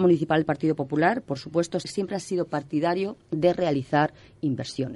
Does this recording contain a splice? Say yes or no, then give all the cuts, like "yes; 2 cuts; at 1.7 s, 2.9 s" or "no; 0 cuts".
yes; 2 cuts; at 1.8 s, 3.2 s